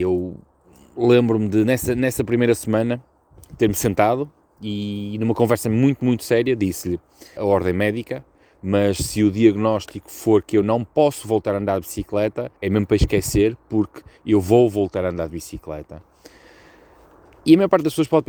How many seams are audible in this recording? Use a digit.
2